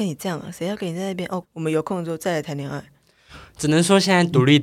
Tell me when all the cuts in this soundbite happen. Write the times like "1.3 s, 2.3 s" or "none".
1.4 s